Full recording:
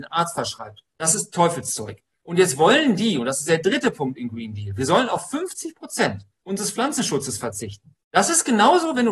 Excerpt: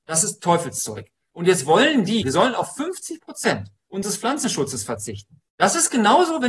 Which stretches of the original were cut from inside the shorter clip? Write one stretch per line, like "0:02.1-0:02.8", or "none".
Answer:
0:03.1-0:04.8